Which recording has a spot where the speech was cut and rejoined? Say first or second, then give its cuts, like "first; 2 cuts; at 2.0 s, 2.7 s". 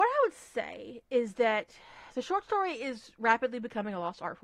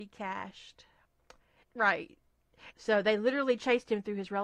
second; 2 cuts; at 1.6 s, 2.7 s